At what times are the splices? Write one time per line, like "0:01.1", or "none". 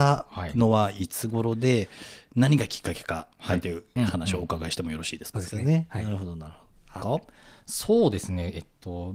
0:05.3
0:07.0